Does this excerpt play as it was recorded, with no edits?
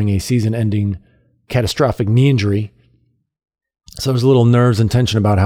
yes; 0 cuts

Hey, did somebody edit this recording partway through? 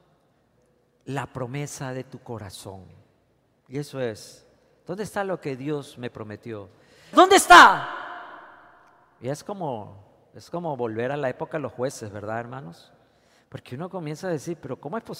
yes; 1 cut; at 7.1 s

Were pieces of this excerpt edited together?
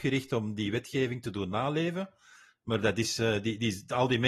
no; 0 cuts

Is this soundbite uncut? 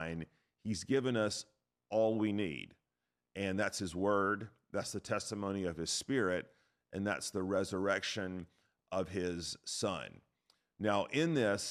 yes; 0 cuts

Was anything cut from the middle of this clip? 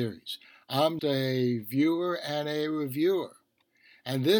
yes; 1 cut; at 1.0 s

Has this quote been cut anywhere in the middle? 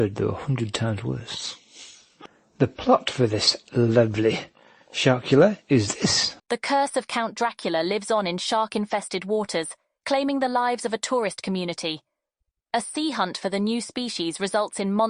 yes; 1 cut; at 6.4 s

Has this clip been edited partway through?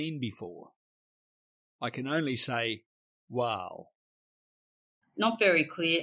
yes; 1 cut; at 5.0 s

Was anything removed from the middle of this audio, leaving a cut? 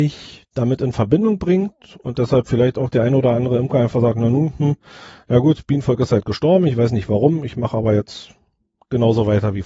no; 0 cuts

